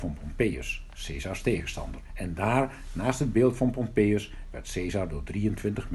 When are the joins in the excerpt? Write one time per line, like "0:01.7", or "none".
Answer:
none